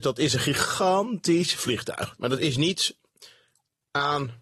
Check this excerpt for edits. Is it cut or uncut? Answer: uncut